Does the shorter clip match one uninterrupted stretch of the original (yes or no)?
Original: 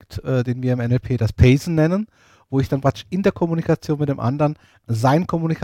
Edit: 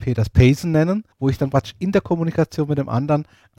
no